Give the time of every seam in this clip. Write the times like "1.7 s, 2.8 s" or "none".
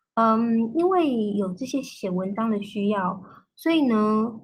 none